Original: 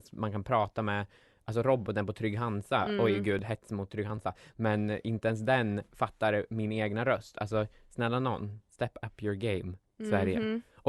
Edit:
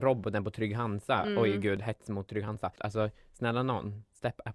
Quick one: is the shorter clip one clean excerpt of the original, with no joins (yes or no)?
no